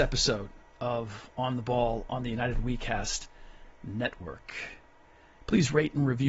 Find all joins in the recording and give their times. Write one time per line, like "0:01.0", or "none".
none

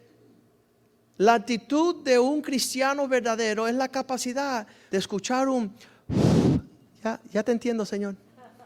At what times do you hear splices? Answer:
0:04.9

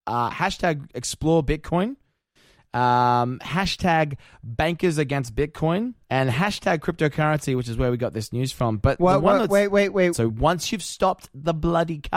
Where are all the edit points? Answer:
0:06.0
0:10.1

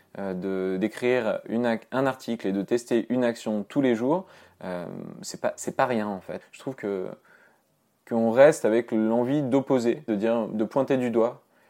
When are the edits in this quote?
0:06.4
0:10.1

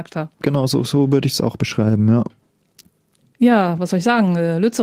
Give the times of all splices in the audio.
none

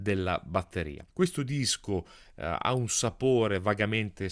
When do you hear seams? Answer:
0:01.1

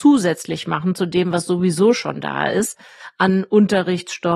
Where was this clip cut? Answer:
none

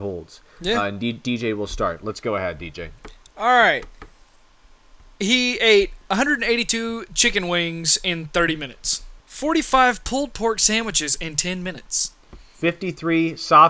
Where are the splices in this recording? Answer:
0:09.2

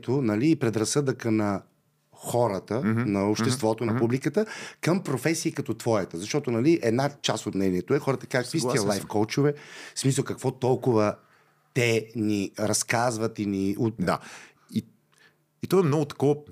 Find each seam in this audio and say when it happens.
0:14.0

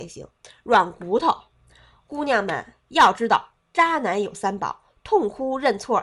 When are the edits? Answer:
0:02.9

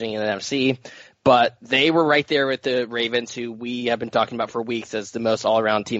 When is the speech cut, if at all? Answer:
none

